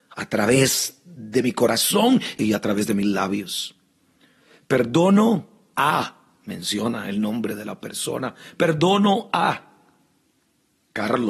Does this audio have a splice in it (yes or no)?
no